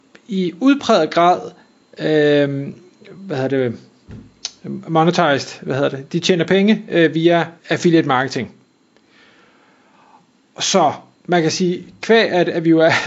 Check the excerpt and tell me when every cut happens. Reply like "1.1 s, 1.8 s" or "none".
7.6 s